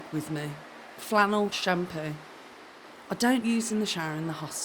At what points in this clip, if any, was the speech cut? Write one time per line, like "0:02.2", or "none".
0:01.5
0:03.4